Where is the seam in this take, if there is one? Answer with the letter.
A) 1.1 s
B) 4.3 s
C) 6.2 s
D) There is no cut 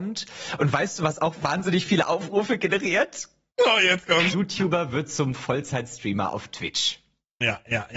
B